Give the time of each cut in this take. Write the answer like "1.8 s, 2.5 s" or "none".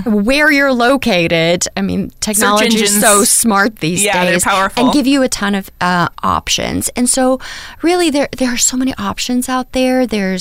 6.1 s